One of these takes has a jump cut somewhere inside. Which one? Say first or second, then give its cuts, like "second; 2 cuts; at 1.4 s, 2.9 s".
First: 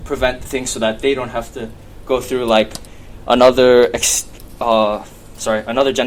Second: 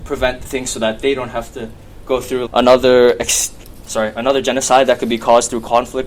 second; 2 cuts; at 2.5 s, 3.8 s